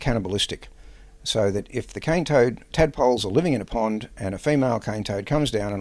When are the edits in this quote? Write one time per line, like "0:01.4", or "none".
0:02.7